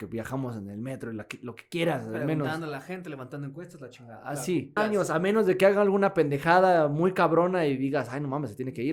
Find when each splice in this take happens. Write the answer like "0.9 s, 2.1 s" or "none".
4.8 s

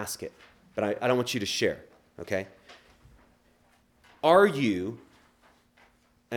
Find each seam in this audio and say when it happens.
none

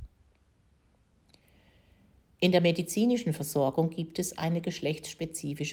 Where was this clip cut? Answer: none

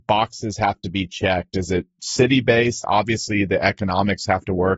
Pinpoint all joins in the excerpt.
2.8 s

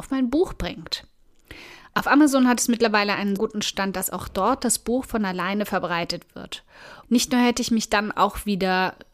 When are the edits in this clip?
3.4 s, 7.0 s

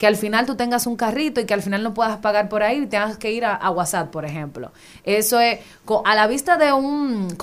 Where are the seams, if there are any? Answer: 6.0 s

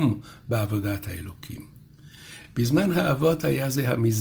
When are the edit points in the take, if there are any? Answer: none

